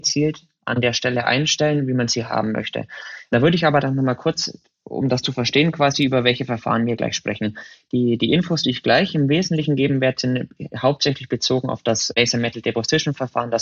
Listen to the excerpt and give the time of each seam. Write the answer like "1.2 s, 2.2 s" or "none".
none